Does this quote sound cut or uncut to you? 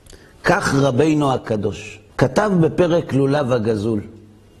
cut